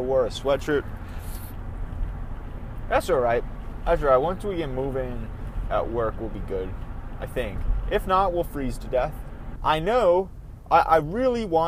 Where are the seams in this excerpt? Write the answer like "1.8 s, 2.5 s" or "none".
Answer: 9.6 s